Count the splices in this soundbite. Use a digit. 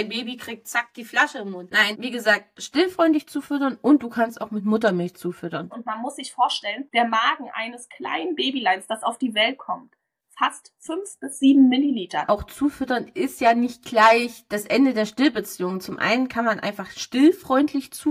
3